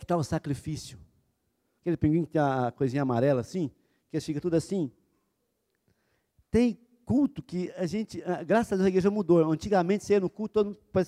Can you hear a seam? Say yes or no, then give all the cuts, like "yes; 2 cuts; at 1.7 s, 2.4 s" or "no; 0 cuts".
yes; 1 cut; at 1.8 s